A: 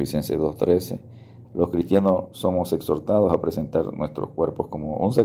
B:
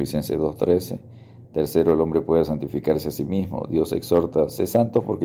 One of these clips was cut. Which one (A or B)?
A